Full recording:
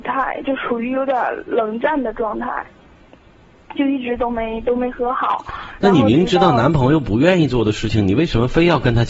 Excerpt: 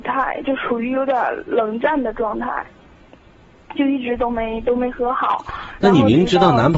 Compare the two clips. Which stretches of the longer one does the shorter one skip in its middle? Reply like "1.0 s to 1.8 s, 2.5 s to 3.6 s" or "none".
none

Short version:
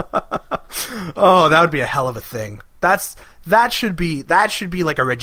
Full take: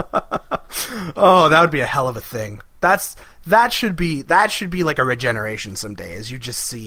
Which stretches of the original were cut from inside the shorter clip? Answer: none

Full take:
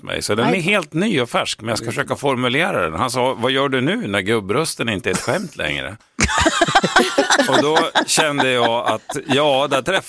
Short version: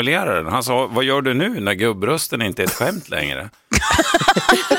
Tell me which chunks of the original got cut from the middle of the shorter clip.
none

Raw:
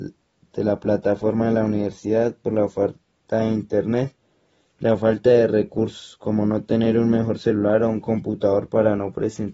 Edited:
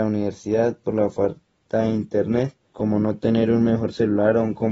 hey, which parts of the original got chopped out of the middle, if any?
4.3 s to 6.2 s

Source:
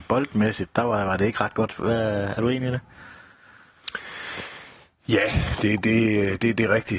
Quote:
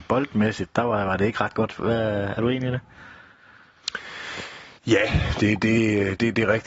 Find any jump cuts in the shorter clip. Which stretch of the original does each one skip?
4.8 s to 5.0 s

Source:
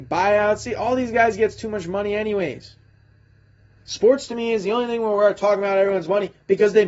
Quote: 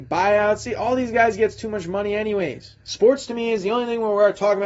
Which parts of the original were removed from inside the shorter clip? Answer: 2.8 s to 3.8 s

